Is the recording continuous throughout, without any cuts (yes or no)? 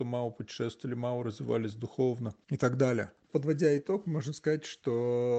no